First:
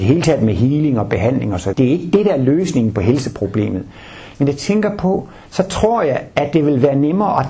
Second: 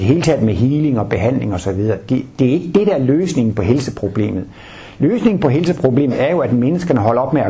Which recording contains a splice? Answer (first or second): first